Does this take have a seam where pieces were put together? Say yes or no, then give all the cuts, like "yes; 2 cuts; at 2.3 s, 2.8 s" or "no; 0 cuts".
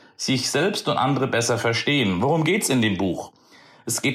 no; 0 cuts